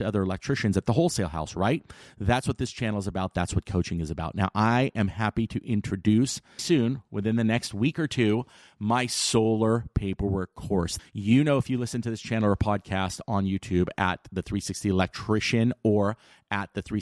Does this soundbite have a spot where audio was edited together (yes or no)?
yes